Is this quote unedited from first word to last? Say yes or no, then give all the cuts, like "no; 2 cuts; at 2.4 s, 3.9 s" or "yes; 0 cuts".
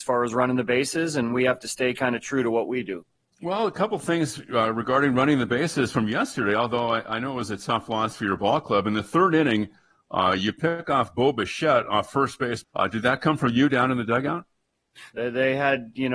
no; 2 cuts; at 12.6 s, 15.1 s